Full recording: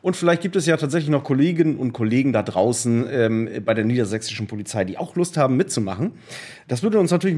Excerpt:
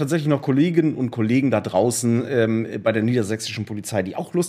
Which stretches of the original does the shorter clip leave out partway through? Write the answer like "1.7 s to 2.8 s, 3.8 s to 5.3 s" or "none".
none